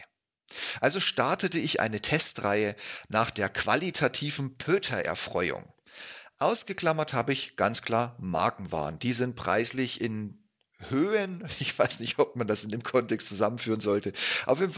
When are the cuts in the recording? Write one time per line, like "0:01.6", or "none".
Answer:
none